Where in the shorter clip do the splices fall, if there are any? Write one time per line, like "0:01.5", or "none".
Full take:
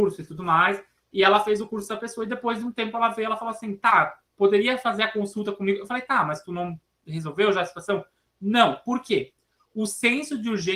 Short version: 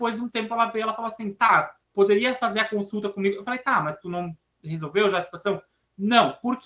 none